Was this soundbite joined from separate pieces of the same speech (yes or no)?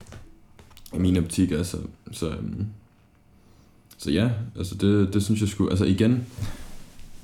no